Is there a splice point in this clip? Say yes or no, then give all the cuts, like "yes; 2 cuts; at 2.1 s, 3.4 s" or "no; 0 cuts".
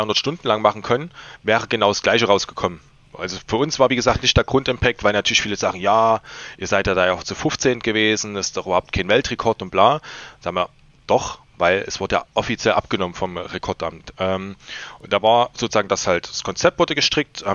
no; 0 cuts